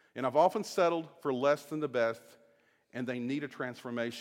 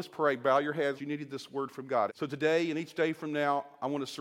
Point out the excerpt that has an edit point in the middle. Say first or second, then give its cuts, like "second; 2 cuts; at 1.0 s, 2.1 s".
second; 2 cuts; at 1.0 s, 2.1 s